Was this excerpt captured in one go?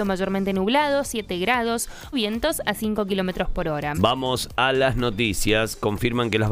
no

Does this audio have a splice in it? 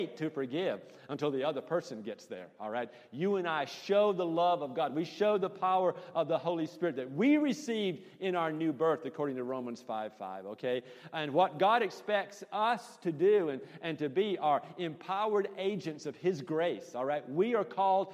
no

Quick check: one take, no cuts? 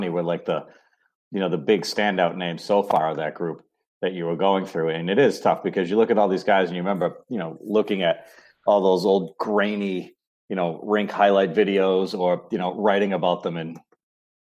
yes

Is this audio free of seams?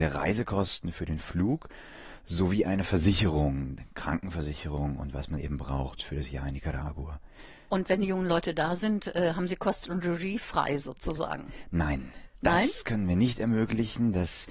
yes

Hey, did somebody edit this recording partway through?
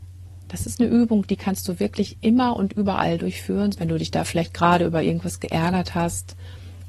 yes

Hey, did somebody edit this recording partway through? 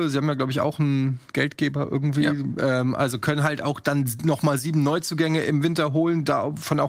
no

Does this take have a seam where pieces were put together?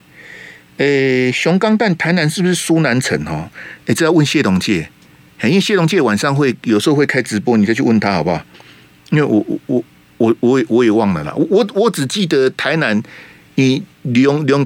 no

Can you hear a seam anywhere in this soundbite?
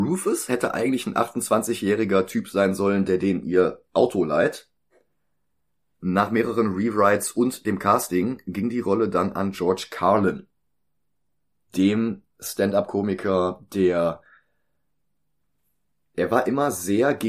no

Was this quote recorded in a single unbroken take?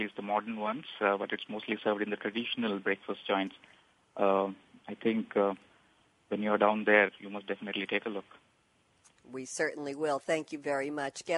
yes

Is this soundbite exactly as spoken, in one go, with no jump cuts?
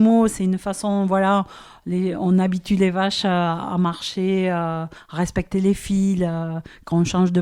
yes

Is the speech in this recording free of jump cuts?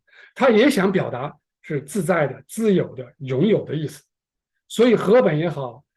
yes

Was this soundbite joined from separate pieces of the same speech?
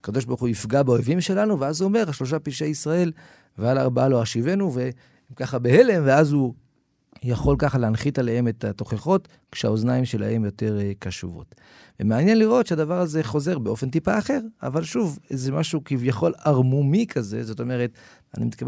no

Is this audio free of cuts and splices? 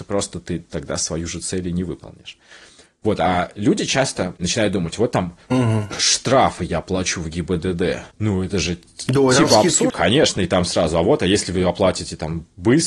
no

